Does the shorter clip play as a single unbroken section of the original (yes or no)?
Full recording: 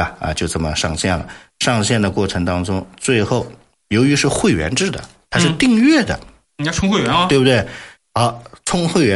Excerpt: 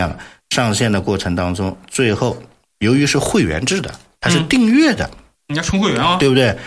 yes